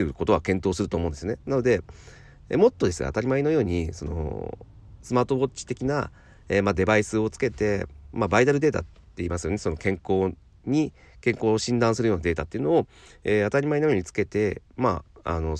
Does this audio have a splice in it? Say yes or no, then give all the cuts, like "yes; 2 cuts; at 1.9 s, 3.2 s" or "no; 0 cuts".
no; 0 cuts